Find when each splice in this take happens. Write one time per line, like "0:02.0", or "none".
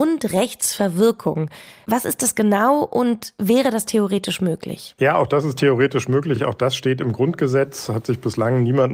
none